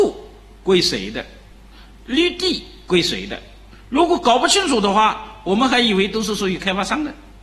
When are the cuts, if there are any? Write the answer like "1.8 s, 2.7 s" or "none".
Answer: none